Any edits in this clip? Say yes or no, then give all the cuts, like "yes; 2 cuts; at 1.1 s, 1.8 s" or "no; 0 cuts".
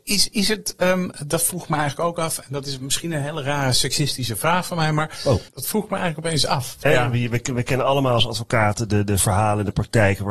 yes; 2 cuts; at 5.5 s, 6.9 s